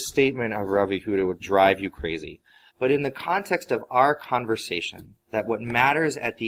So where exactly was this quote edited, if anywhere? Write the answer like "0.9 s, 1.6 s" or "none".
1.4 s, 2.7 s, 5.2 s

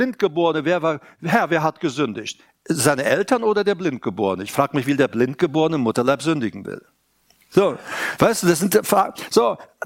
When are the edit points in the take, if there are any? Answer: 8.2 s

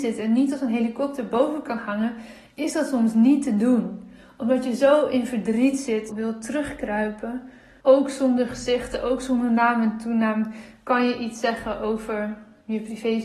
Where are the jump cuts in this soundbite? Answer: 6.1 s, 7.8 s

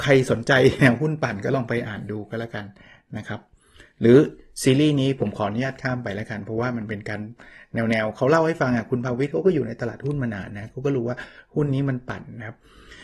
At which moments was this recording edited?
none

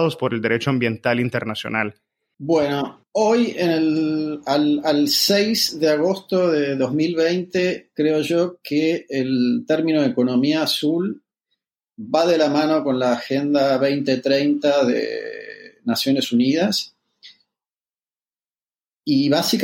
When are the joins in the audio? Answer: 2.3 s

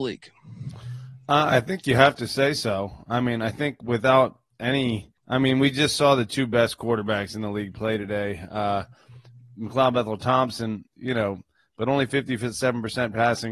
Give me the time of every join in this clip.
5.2 s, 10.9 s

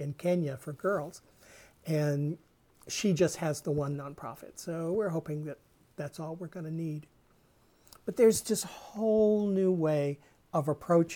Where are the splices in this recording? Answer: none

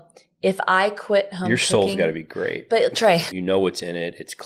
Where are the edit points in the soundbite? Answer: 3.3 s

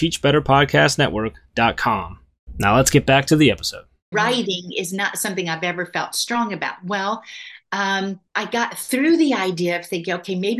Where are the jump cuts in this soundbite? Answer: 4.1 s, 8.3 s

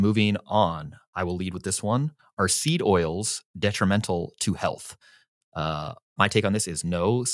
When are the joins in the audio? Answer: none

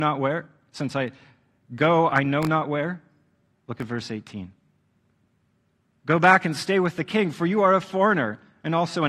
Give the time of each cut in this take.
3.5 s, 6.0 s

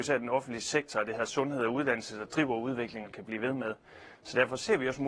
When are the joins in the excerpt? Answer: 3.0 s

